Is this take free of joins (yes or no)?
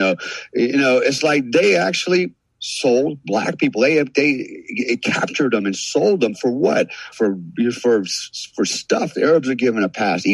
no